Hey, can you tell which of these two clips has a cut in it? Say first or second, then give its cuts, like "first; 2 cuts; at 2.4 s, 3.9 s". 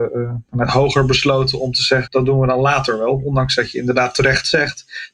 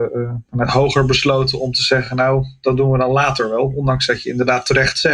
first; 1 cut; at 2.1 s